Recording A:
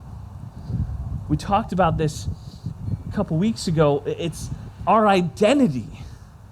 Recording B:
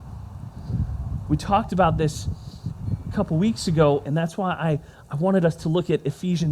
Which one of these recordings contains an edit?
B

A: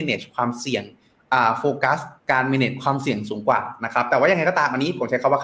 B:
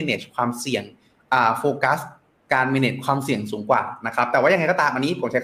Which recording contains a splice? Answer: A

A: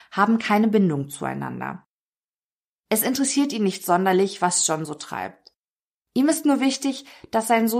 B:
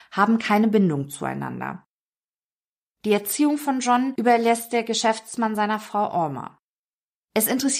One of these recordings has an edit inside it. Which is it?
A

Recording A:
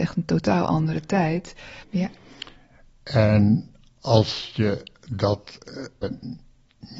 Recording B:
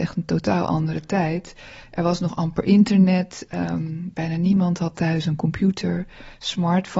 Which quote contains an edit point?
A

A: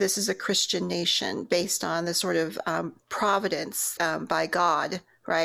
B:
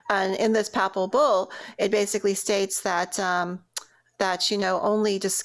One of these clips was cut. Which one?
A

